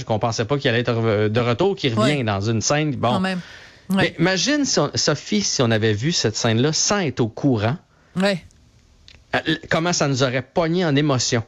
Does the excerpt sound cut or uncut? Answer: uncut